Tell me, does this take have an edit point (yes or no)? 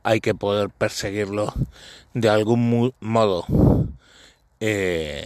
no